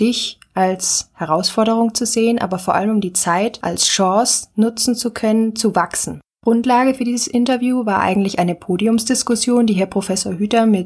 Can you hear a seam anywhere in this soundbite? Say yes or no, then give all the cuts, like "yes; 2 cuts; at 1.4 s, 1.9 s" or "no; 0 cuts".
no; 0 cuts